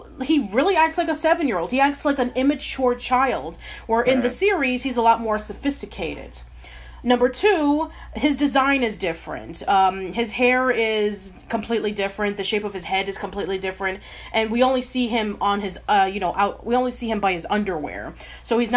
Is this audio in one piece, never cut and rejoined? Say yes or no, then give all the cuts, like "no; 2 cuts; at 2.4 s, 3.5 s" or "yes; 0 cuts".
yes; 0 cuts